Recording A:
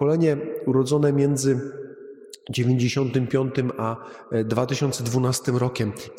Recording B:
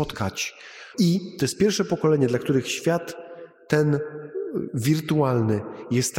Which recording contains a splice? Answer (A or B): B